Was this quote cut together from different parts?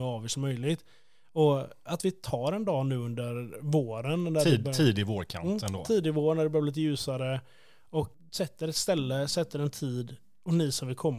no; 0 cuts

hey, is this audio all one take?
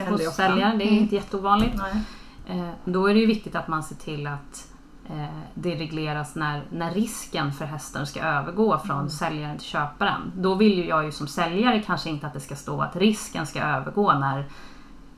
yes; 0 cuts

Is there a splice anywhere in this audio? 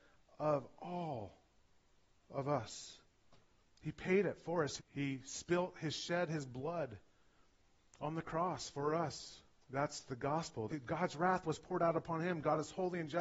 yes; 3 cuts; at 4.8 s, 9.6 s, 10.7 s

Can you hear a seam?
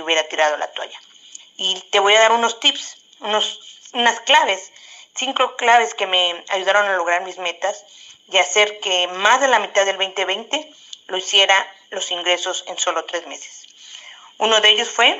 yes; 1 cut; at 1.4 s

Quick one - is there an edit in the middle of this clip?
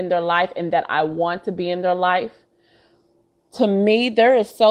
no; 0 cuts

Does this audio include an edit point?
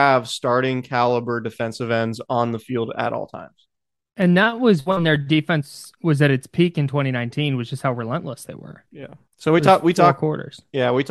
no; 0 cuts

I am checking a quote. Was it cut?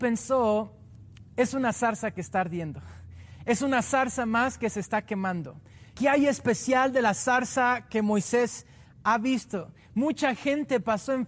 yes; 1 cut; at 6.0 s

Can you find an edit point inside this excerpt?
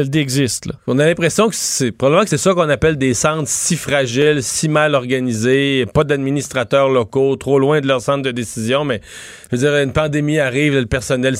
yes; 2 cuts; at 2.3 s, 9.4 s

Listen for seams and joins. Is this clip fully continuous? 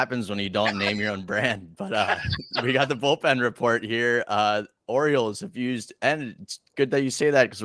yes; 0 cuts

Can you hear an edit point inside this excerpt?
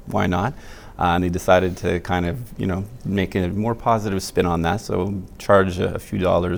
no; 0 cuts

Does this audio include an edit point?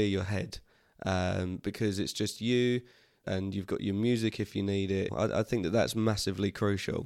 yes; 2 cuts; at 3.2 s, 5.1 s

